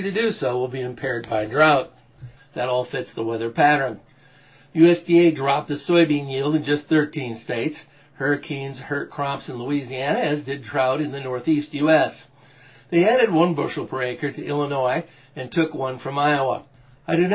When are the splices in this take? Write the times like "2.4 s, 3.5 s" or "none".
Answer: 2.4 s